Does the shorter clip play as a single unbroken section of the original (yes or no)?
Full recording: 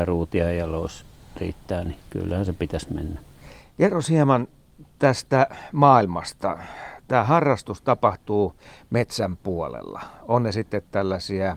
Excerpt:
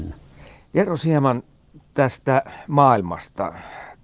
yes